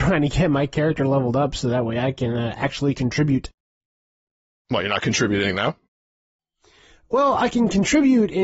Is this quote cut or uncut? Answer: uncut